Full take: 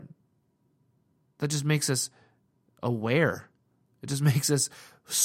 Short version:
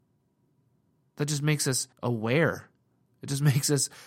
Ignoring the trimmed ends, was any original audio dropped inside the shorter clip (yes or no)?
yes